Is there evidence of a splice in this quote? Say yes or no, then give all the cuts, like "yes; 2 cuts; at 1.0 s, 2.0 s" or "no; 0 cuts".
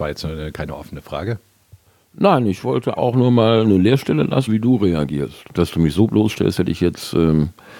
yes; 3 cuts; at 3.0 s, 4.5 s, 5.5 s